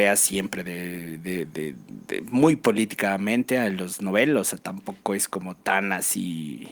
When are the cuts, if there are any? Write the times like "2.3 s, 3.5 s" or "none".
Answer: 1.5 s